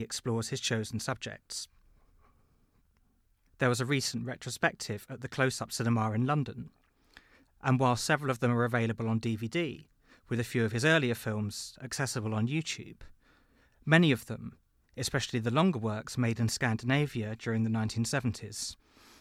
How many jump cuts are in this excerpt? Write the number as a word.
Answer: one